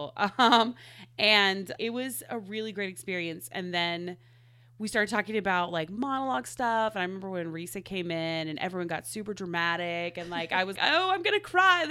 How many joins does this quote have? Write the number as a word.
two